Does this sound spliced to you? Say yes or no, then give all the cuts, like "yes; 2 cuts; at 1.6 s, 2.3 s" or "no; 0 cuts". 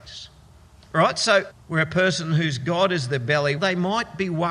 yes; 2 cuts; at 1.5 s, 3.6 s